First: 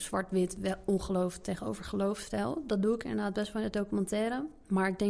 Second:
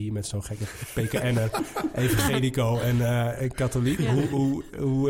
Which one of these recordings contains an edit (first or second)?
second